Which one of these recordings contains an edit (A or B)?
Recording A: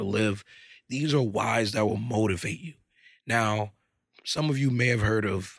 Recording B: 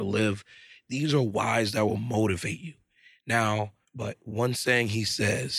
B